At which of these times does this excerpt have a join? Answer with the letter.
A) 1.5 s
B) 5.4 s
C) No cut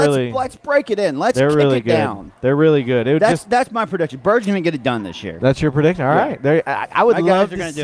C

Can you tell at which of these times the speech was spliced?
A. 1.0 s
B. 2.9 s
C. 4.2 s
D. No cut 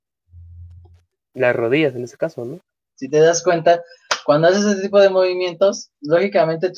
B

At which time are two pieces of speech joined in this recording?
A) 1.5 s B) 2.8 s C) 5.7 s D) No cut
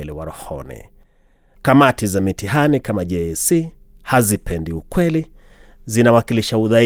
A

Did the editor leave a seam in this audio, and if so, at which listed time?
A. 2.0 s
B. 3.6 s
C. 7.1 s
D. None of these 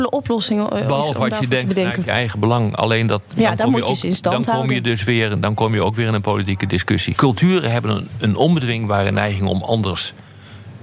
C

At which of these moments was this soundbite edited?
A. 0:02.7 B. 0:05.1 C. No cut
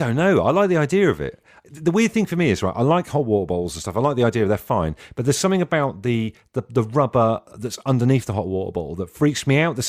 C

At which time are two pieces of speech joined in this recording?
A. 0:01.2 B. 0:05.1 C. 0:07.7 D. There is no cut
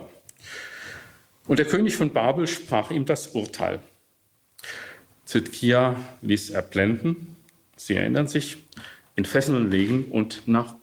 B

